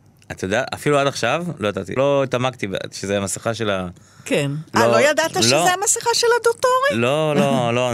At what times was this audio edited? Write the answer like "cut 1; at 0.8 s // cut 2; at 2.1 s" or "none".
cut 1; at 2.0 s